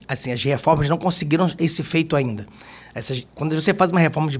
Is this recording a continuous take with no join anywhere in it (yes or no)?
no